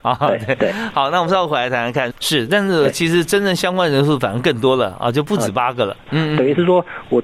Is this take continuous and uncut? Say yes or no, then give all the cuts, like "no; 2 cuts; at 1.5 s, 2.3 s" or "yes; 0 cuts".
no; 2 cuts; at 2.1 s, 6.1 s